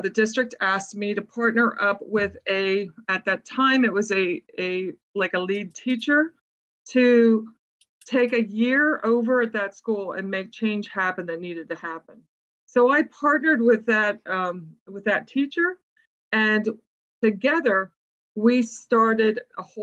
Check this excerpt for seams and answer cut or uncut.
uncut